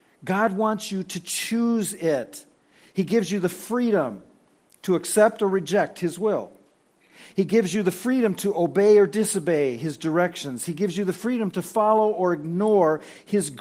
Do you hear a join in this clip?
no; 0 cuts

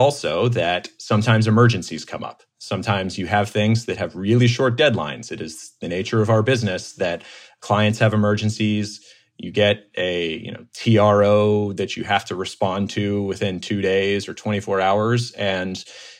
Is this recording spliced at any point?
no; 0 cuts

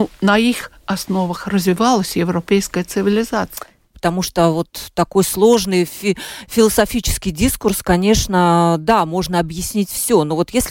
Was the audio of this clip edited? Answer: yes; 2 cuts; at 3.8 s, 5.9 s

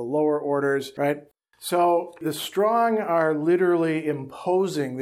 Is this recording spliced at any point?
no; 0 cuts

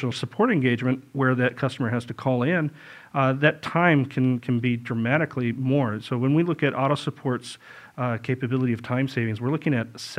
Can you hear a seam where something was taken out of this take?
no; 0 cuts

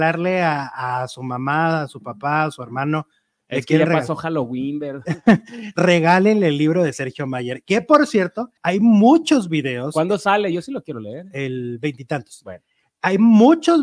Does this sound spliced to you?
yes; 1 cut; at 8.6 s

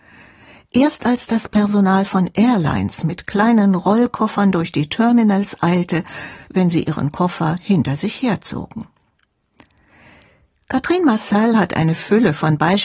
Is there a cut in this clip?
yes; 1 cut; at 6.5 s

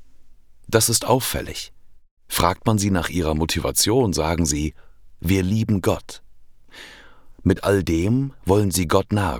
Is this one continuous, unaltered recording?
yes; 0 cuts

